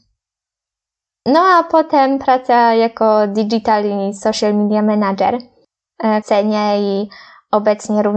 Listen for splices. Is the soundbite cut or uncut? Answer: cut